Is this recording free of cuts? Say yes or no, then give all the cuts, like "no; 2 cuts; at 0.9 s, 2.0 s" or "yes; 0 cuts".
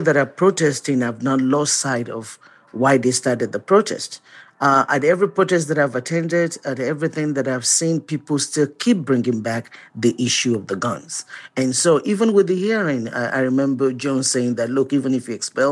yes; 0 cuts